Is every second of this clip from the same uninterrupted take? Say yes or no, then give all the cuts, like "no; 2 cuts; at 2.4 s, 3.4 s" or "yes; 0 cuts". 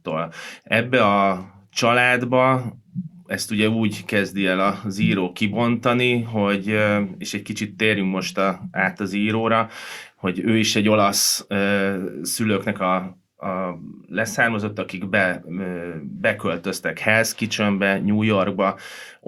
yes; 0 cuts